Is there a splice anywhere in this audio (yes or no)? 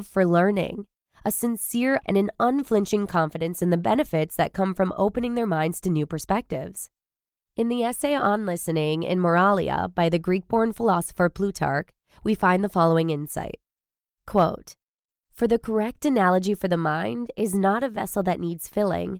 yes